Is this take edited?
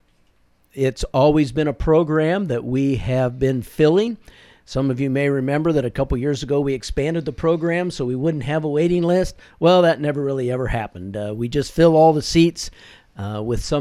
no; 0 cuts

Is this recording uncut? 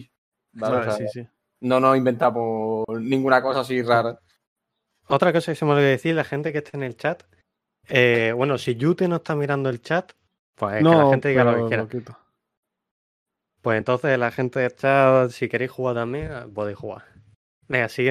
yes; 0 cuts

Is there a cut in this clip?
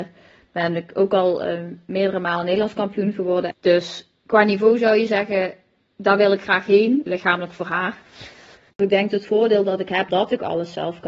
yes; 3 cuts; at 3.5 s, 7.1 s, 10.1 s

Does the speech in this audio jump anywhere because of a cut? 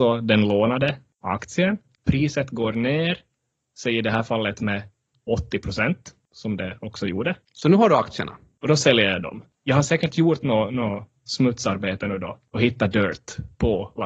yes; 2 cuts; at 2.0 s, 7.4 s

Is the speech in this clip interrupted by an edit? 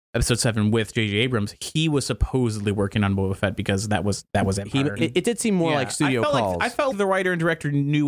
yes; 2 cuts; at 5.0 s, 6.9 s

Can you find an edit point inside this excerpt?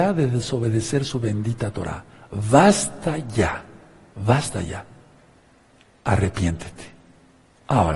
no; 0 cuts

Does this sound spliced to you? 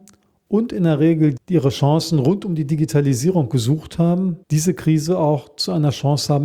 yes; 2 cuts; at 1.4 s, 4.4 s

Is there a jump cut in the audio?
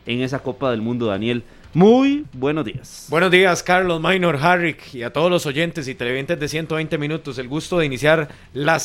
no; 0 cuts

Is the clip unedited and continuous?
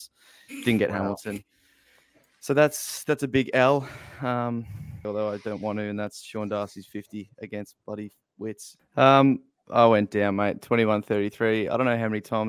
no; 2 cuts; at 5.0 s, 8.8 s

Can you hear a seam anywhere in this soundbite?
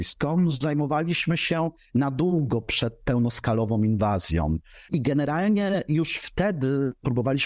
yes; 1 cut; at 4.9 s

